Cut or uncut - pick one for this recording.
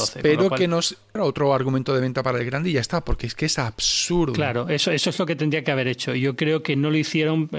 cut